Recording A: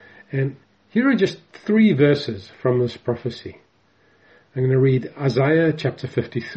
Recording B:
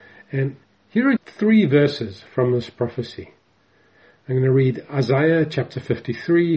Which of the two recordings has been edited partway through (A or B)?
B